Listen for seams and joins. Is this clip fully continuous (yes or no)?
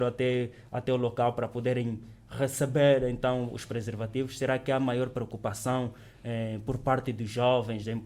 yes